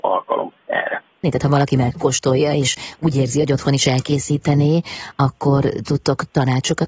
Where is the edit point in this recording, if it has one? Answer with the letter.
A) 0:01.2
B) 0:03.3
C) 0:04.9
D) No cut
A